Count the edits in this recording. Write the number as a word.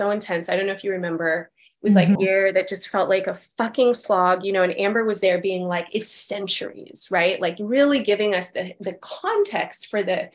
one